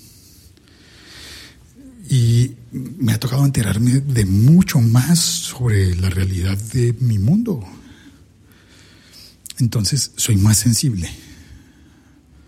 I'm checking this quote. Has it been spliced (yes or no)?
no